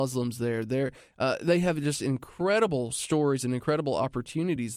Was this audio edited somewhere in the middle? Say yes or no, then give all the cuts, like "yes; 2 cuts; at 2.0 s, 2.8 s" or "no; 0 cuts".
no; 0 cuts